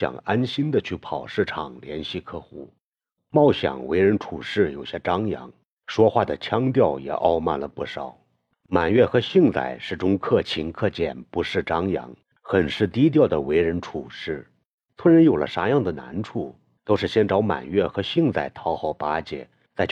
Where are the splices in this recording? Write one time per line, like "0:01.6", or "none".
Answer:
none